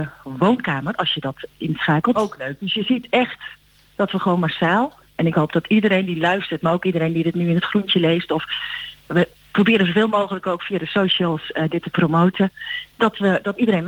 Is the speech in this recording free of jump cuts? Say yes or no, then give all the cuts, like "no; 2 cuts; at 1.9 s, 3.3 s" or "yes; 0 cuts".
no; 1 cut; at 2.2 s